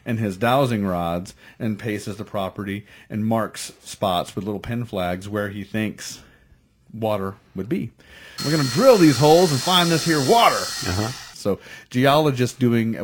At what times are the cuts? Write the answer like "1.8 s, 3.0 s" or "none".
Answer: 8.4 s, 11.3 s